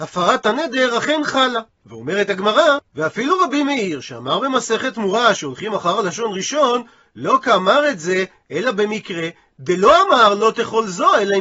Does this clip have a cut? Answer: no; 0 cuts

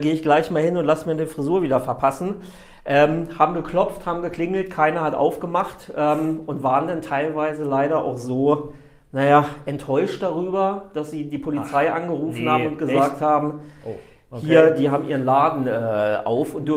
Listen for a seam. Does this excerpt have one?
no; 0 cuts

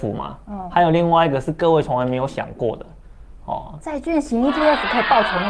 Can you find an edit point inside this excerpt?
yes; 1 cut; at 3.8 s

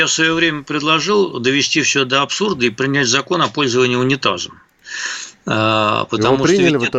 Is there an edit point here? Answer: no; 0 cuts

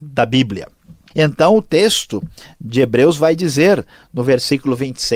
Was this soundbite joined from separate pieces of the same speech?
yes; 1 cut; at 1.1 s

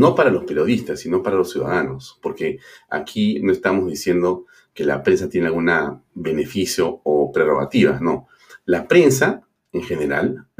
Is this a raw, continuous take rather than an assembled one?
yes; 0 cuts

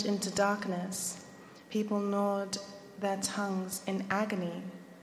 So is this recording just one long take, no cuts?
yes; 0 cuts

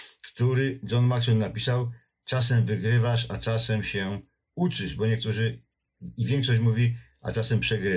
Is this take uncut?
yes; 0 cuts

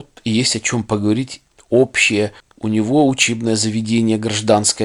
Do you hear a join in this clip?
no; 0 cuts

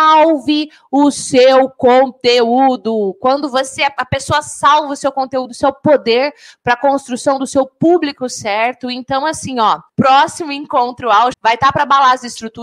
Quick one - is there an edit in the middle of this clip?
yes; 2 cuts; at 9.9 s, 11.3 s

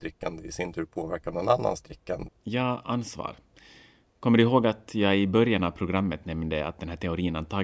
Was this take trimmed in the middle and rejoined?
yes; 1 cut; at 2.3 s

